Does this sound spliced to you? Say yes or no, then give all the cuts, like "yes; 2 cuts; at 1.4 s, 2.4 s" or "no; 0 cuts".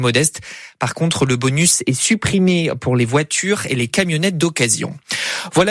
no; 0 cuts